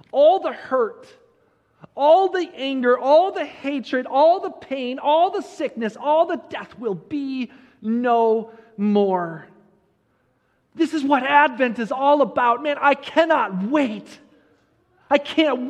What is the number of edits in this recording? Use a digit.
0